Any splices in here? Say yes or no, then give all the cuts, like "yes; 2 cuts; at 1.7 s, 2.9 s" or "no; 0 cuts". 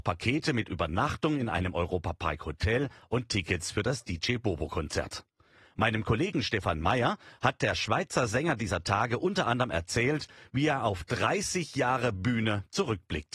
no; 0 cuts